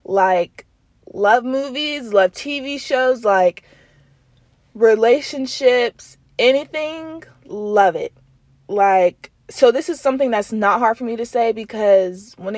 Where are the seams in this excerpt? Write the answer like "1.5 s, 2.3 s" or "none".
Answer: none